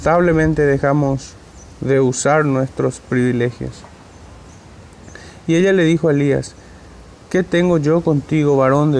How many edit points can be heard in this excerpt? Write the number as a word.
zero